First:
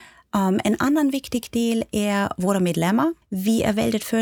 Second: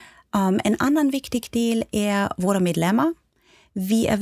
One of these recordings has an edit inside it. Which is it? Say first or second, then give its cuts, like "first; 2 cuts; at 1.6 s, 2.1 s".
first; 1 cut; at 3.2 s